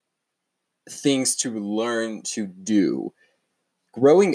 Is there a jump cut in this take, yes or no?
no